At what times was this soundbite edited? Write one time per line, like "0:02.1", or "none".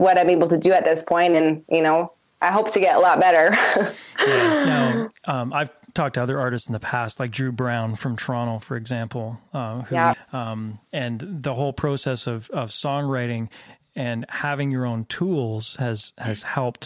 0:10.1